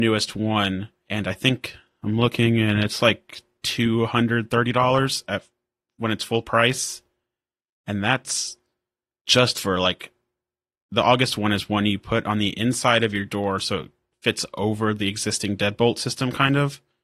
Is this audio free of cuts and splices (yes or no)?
yes